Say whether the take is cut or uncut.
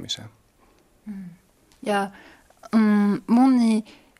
uncut